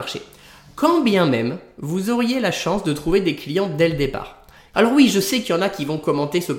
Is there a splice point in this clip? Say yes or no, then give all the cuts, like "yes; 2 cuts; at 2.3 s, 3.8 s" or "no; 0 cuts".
yes; 1 cut; at 4.7 s